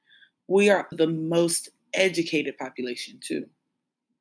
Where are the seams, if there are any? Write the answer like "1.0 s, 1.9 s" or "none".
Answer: 0.9 s